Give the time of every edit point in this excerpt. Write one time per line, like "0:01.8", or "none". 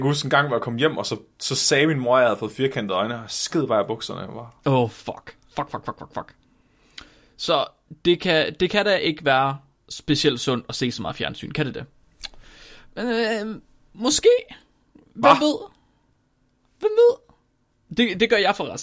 none